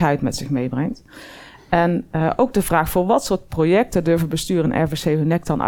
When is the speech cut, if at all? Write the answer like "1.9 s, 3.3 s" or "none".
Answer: none